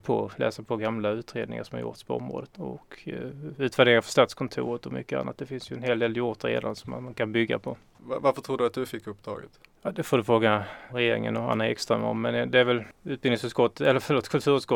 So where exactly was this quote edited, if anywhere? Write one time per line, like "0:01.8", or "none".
0:02.5
0:10.9

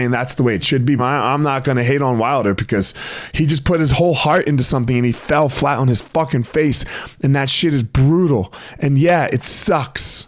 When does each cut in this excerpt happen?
0:01.0

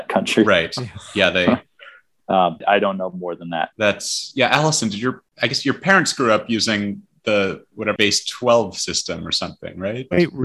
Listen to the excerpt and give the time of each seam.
0:02.6
0:03.7
0:08.0

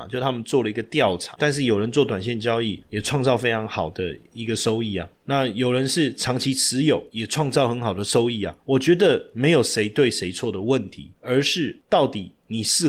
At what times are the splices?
0:01.3

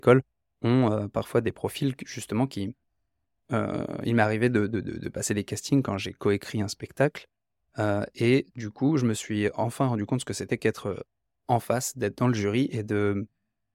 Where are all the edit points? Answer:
none

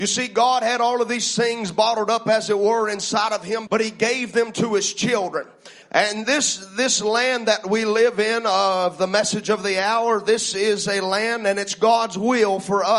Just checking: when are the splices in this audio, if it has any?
0:03.7
0:05.8

